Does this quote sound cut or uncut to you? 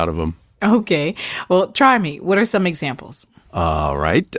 uncut